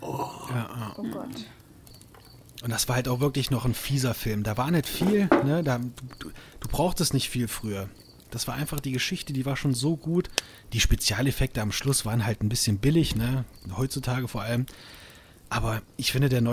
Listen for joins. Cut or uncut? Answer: uncut